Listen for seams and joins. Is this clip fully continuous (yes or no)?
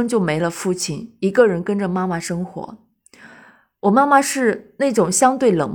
yes